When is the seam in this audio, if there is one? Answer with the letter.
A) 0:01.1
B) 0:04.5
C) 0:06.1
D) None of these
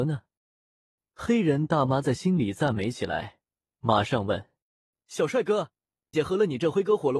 C